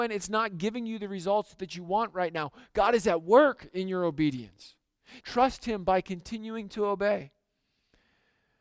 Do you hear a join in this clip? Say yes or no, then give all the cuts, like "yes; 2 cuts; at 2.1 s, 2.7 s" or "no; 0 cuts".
yes; 1 cut; at 5.2 s